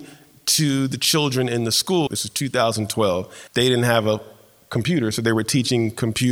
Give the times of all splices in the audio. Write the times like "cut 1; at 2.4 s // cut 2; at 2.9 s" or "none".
cut 1; at 2.1 s // cut 2; at 3.5 s